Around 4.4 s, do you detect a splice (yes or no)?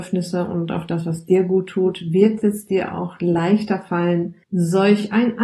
yes